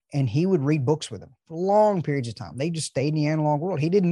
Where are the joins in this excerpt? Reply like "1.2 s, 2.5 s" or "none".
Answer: 1.4 s